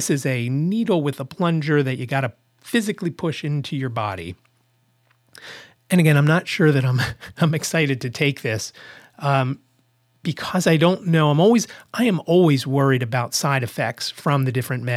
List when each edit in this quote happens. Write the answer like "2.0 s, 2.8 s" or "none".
none